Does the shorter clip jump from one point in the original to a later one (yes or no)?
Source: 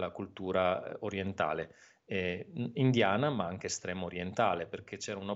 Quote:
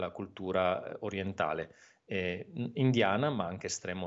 no